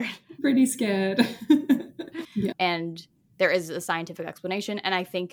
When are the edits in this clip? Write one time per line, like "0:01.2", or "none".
0:02.2